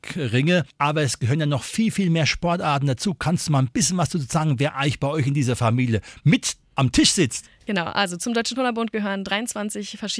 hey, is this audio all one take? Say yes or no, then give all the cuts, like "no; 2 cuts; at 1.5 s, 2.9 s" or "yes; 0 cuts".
yes; 0 cuts